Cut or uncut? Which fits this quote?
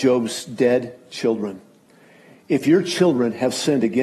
uncut